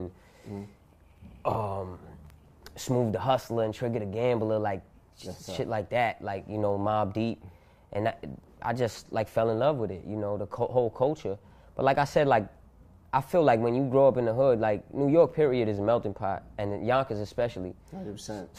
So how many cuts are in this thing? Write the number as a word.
zero